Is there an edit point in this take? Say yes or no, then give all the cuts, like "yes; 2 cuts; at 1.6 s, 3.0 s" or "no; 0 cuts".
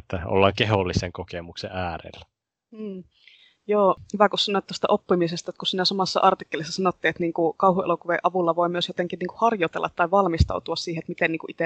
no; 0 cuts